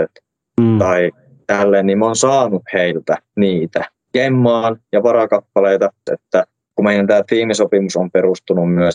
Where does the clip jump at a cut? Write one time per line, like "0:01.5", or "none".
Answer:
0:06.1